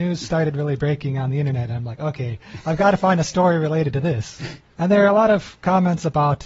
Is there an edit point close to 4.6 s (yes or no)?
yes